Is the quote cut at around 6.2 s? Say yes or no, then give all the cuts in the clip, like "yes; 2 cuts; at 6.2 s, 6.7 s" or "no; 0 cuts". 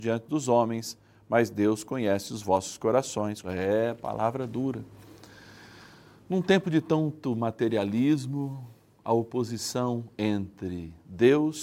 no; 1 cut; at 3.4 s